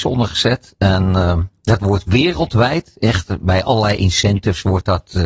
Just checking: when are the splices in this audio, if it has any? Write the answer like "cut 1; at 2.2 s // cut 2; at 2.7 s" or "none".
none